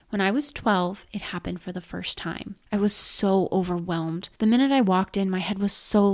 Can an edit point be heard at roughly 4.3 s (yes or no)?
yes